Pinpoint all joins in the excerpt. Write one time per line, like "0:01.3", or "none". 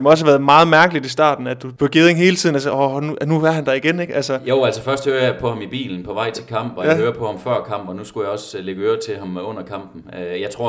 0:01.8